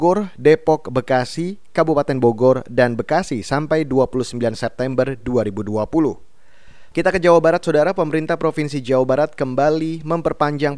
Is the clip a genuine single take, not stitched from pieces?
no; 1 cut; at 6.9 s

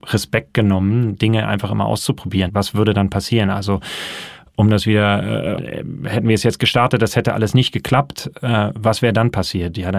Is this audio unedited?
no; 2 cuts; at 2.5 s, 5.6 s

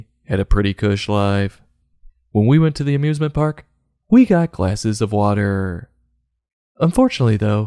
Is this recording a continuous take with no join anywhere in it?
yes; 0 cuts

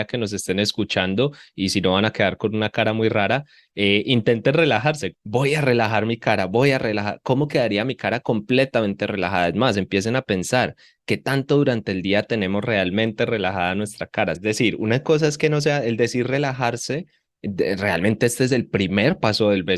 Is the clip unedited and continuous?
no; 2 cuts; at 5.1 s, 14.4 s

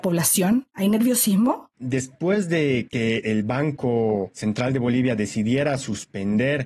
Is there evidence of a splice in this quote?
yes; 1 cut; at 1.8 s

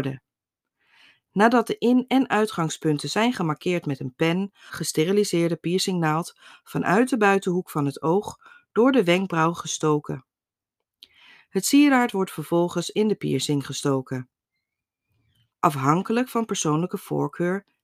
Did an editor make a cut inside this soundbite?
yes; 2 cuts; at 4.7 s, 15.5 s

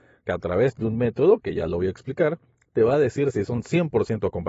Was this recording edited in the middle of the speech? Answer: no; 0 cuts

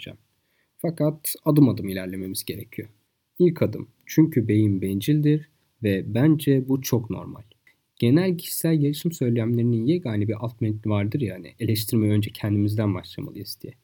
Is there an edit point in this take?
no; 0 cuts

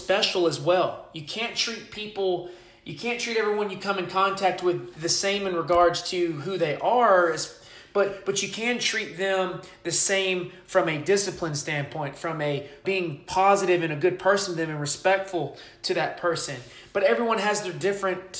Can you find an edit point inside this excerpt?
yes; 1 cut; at 12.8 s

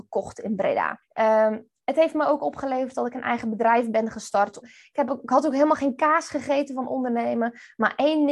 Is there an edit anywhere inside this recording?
yes; 2 cuts; at 1.0 s, 4.6 s

